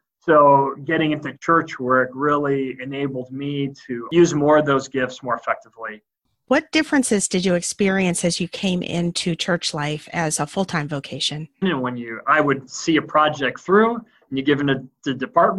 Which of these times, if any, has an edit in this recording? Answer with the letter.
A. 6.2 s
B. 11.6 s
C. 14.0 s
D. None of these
B